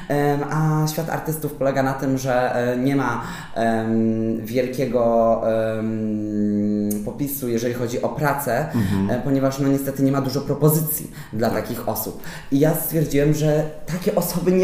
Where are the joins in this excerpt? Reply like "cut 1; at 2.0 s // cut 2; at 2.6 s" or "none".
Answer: none

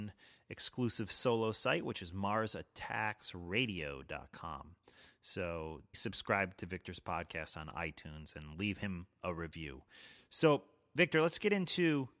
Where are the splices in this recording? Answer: cut 1; at 5.9 s

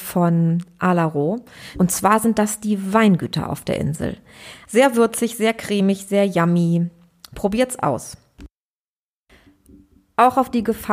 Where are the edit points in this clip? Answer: cut 1; at 1.7 s // cut 2; at 4.6 s

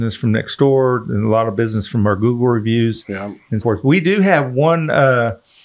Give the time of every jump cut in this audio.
cut 1; at 3.6 s

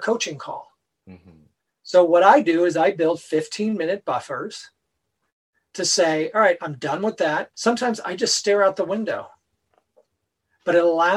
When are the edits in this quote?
cut 1; at 7.5 s

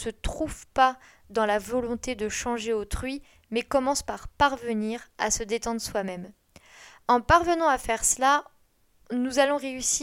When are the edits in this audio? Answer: none

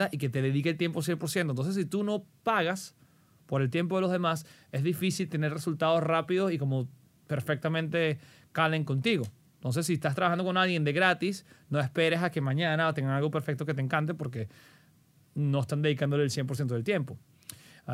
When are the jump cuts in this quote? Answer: none

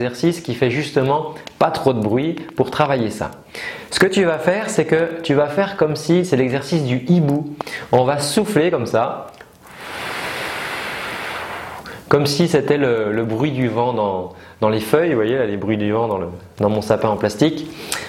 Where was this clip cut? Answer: none

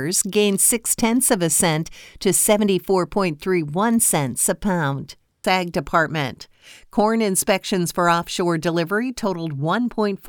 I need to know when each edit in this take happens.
cut 1; at 5.4 s

